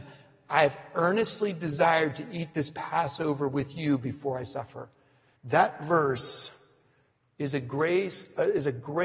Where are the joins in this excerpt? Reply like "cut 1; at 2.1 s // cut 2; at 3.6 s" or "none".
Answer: cut 1; at 5.4 s

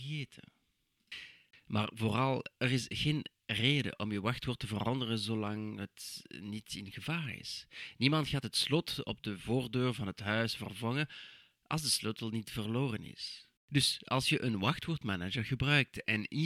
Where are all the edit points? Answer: cut 1; at 1.5 s // cut 2; at 13.6 s

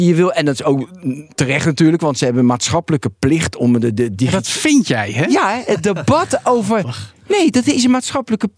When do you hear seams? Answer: none

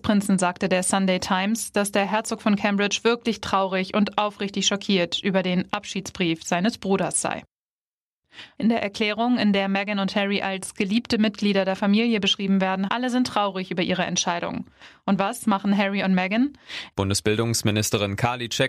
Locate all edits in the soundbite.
cut 1; at 8.5 s // cut 2; at 12.9 s // cut 3; at 16.9 s

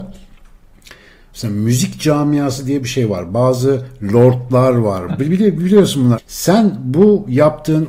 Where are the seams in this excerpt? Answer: cut 1; at 3.3 s // cut 2; at 5.1 s // cut 3; at 6.2 s

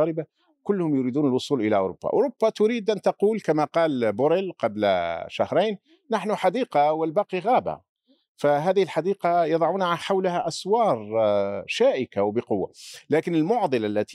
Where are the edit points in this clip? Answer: none

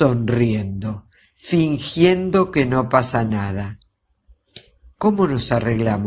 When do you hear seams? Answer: none

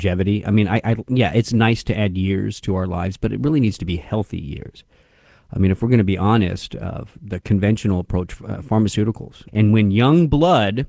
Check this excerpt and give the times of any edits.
cut 1; at 7.2 s // cut 2; at 8.4 s // cut 3; at 9.5 s

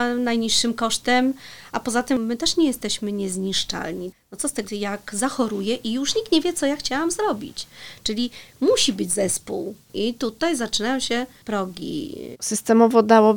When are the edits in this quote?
cut 1; at 4.6 s // cut 2; at 12.3 s

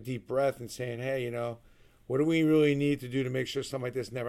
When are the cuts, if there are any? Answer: none

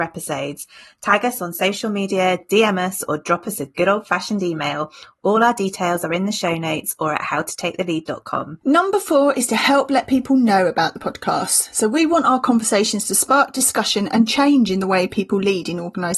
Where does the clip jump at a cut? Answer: none

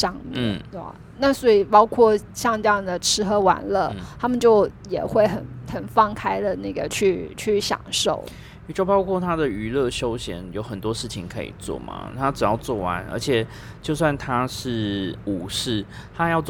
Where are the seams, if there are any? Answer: none

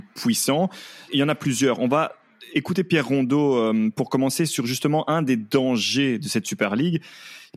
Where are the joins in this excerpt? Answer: cut 1; at 1.1 s

